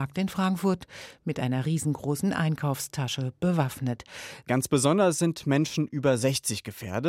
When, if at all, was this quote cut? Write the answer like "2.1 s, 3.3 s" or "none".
4.4 s